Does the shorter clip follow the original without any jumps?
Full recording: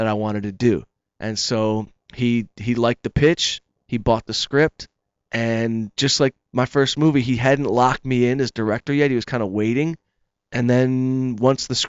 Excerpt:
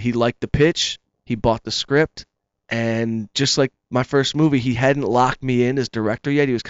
yes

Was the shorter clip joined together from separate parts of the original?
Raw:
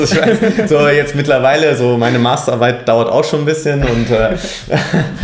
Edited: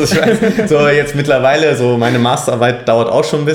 no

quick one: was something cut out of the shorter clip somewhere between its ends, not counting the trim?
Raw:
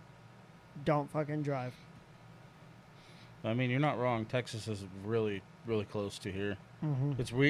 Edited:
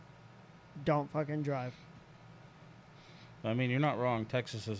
no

